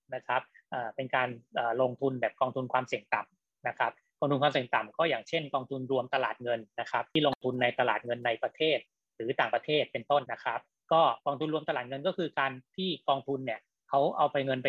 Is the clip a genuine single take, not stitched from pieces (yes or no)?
no